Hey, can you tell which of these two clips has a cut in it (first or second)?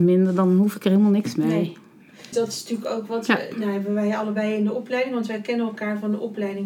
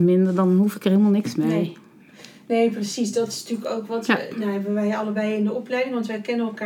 first